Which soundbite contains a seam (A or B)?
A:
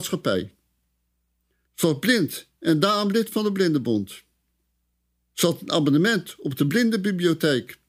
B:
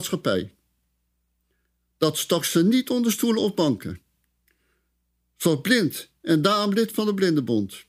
A